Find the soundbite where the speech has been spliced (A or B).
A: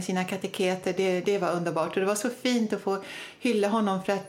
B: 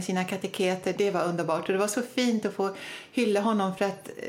B